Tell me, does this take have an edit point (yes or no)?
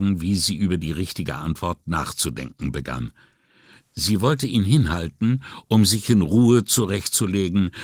no